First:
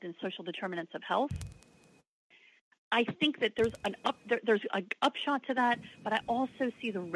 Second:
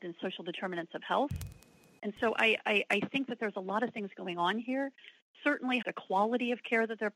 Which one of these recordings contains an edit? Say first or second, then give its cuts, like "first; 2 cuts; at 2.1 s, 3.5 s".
second; 2 cuts; at 2.0 s, 5.8 s